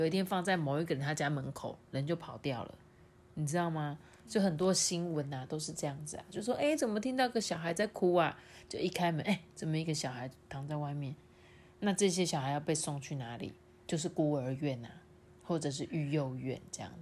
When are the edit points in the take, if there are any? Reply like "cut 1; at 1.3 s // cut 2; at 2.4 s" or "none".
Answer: none